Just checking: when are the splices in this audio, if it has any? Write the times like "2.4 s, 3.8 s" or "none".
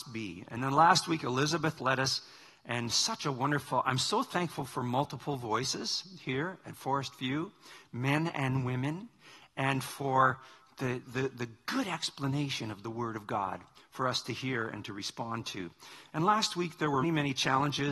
11.0 s, 17.0 s